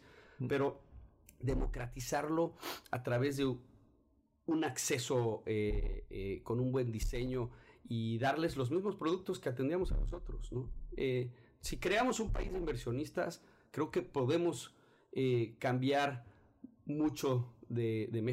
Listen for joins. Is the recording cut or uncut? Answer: uncut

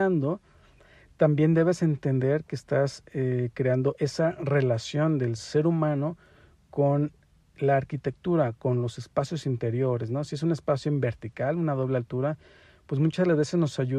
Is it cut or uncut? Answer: uncut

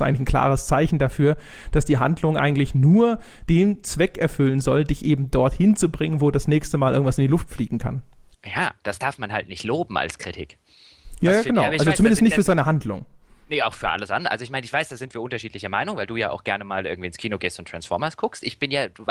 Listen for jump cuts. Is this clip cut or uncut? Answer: uncut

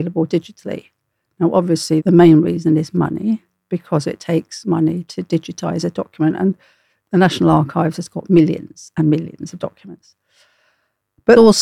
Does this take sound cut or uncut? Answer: uncut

